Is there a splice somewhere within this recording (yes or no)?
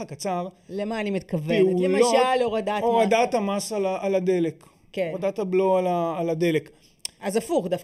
no